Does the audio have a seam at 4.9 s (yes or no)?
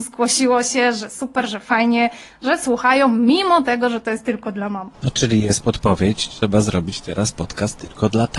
yes